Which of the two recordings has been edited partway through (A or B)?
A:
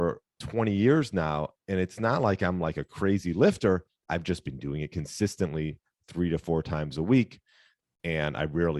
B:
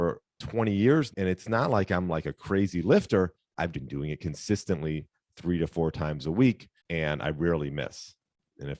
B